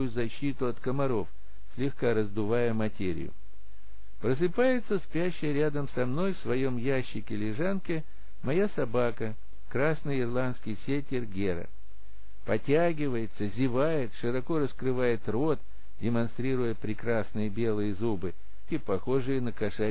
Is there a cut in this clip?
yes; 1 cut; at 18.7 s

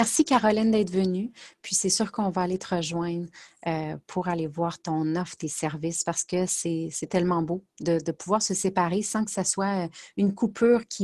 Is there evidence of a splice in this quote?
no; 0 cuts

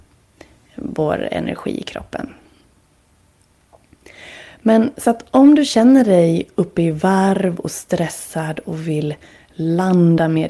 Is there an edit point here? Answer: no; 0 cuts

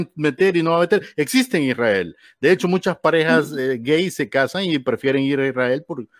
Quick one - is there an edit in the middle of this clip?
no; 0 cuts

